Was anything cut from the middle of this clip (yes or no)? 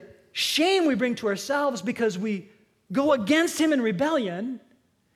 no